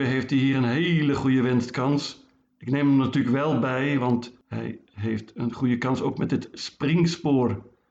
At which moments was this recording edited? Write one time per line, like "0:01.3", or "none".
0:02.4